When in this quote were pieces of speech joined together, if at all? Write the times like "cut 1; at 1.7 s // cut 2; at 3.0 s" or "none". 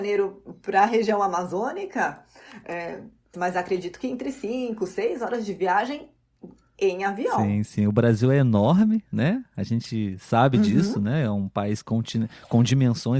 cut 1; at 3.3 s

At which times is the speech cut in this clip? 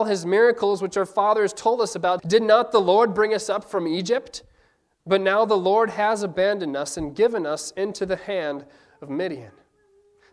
cut 1; at 2.2 s

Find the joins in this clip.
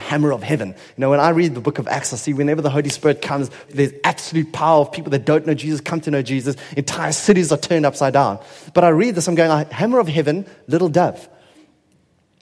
cut 1; at 3.7 s

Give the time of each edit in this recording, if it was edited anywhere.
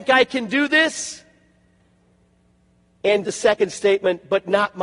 cut 1; at 3.2 s

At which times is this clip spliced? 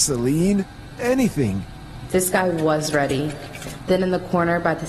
cut 1; at 2.1 s // cut 2; at 3.8 s

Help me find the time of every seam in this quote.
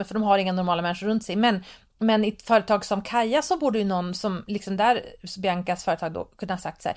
none

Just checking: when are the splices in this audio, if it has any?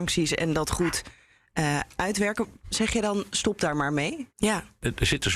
cut 1; at 4.3 s

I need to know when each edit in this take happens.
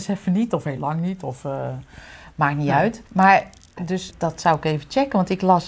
cut 1; at 3.1 s // cut 2; at 4.1 s

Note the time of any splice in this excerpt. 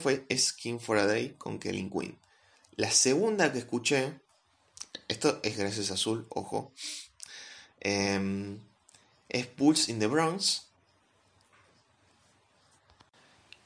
none

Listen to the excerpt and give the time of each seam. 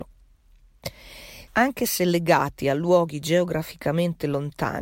cut 1; at 1.5 s

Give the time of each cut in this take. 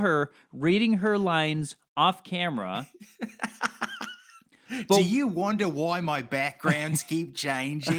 none

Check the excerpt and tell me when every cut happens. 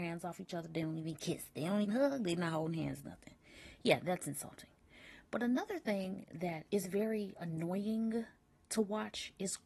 cut 1; at 1.8 s // cut 2; at 6.7 s

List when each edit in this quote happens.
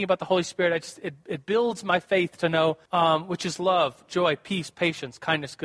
cut 1; at 2.9 s

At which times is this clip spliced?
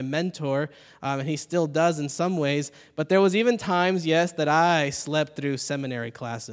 none

